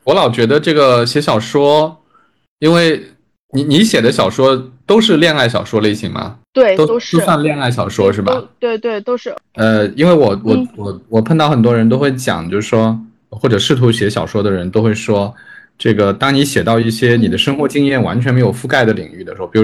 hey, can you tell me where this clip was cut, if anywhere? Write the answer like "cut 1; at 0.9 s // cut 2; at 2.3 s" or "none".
none